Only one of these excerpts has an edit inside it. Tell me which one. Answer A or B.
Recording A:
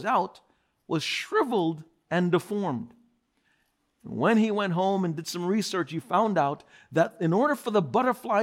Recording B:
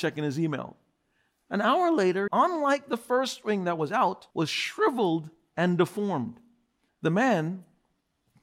B